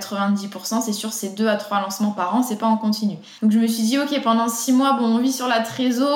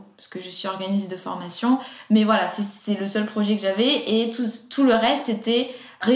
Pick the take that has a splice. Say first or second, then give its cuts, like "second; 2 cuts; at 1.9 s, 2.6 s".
first; 1 cut; at 3.4 s